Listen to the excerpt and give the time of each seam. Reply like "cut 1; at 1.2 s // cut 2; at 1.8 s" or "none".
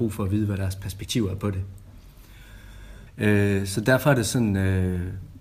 cut 1; at 3.1 s